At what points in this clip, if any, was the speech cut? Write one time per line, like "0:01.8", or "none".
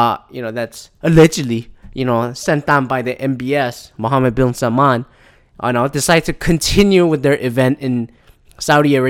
none